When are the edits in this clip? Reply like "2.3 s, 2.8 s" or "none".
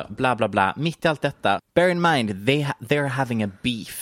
none